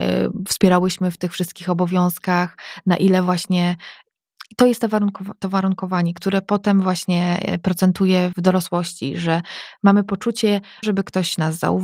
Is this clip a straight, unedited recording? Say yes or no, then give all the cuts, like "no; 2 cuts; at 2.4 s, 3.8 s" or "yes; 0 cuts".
no; 2 cuts; at 8.3 s, 10.8 s